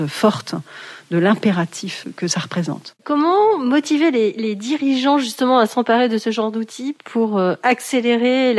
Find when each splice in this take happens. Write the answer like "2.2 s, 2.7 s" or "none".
3.0 s

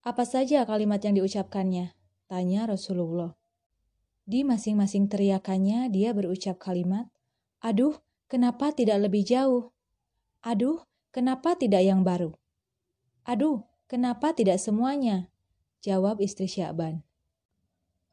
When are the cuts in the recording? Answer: none

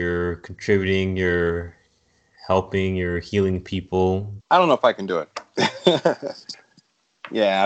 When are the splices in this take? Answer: 4.4 s

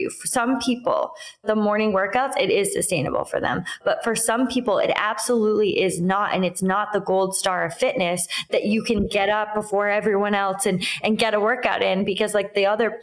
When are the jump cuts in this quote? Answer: none

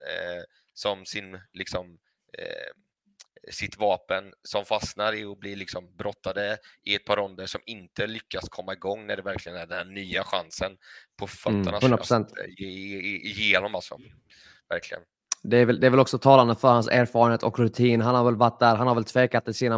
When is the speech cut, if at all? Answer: 11.8 s

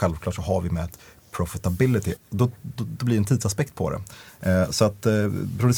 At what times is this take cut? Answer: 2.2 s

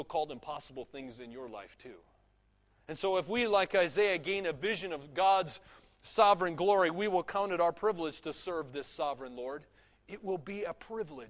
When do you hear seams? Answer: none

